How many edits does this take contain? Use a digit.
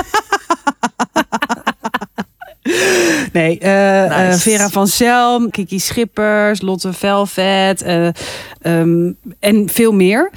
1